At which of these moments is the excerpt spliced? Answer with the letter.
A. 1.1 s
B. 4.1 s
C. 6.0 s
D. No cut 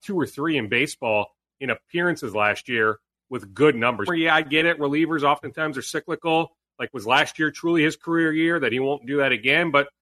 B